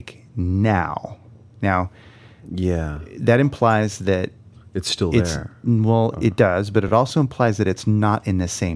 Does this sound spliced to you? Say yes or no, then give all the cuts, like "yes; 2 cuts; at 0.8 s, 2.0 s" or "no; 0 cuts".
no; 0 cuts